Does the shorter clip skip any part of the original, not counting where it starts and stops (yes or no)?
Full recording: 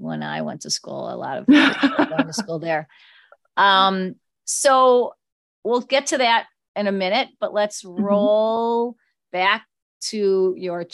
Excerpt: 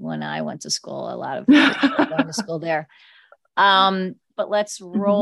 yes